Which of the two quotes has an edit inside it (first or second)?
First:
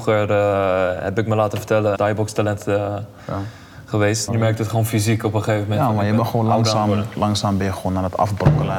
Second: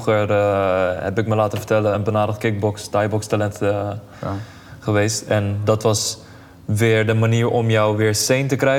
first